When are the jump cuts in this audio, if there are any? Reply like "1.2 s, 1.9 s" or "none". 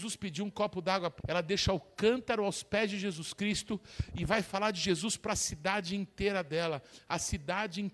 1.2 s